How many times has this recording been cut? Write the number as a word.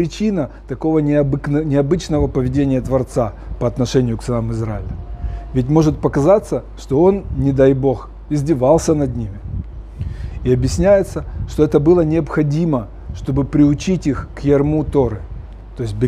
zero